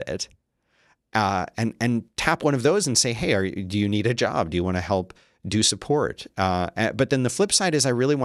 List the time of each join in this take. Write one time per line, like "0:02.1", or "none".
none